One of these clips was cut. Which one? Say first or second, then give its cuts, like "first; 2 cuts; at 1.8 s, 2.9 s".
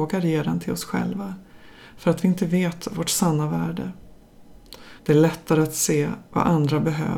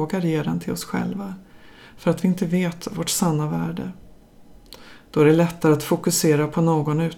first; 1 cut; at 5.0 s